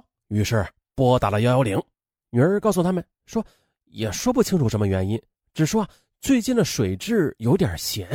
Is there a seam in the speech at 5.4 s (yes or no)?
no